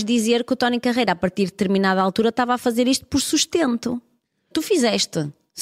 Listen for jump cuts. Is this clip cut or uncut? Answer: cut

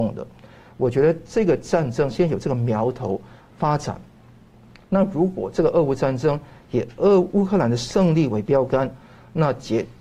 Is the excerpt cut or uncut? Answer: uncut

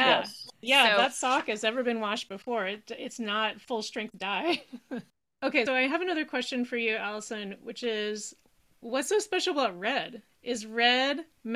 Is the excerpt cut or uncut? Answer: cut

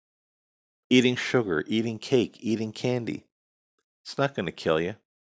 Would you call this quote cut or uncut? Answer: uncut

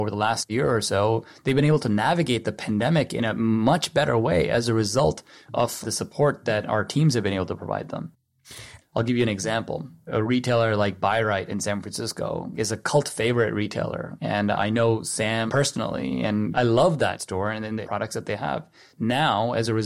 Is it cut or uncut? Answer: cut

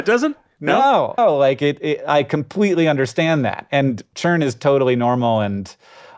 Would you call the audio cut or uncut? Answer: cut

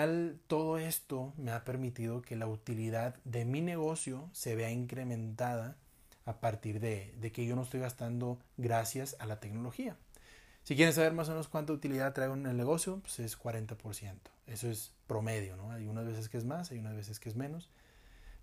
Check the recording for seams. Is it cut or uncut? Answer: uncut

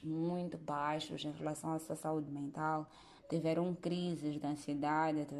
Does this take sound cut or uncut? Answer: uncut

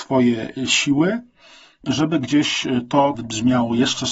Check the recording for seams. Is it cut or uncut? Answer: cut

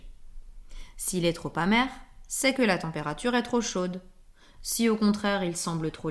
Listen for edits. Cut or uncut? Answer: uncut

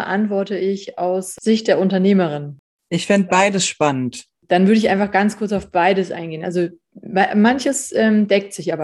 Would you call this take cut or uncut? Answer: uncut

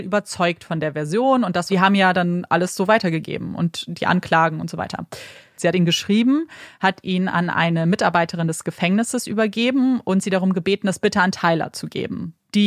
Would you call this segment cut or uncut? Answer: cut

